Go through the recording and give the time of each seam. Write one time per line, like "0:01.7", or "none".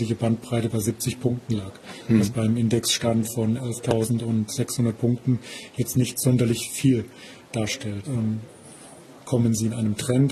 0:08.0